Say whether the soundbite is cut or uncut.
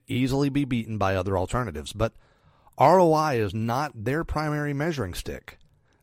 uncut